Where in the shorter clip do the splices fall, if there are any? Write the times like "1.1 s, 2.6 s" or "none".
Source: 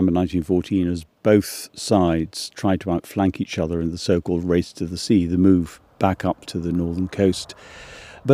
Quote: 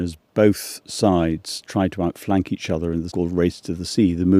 3.1 s

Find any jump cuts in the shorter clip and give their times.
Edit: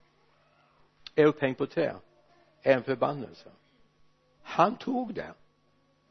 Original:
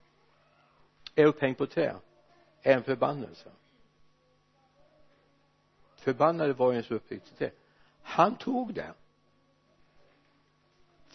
4.3 s

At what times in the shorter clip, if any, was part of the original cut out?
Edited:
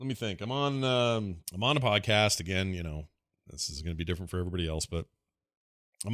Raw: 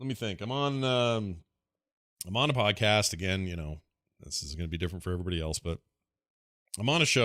1.4 s

